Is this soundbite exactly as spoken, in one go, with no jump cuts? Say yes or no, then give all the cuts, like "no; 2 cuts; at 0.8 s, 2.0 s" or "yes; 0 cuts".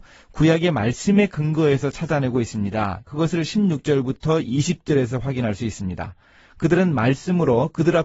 no; 1 cut; at 3.1 s